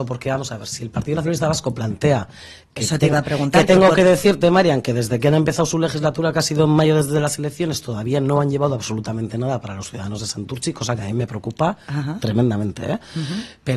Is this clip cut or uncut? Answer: uncut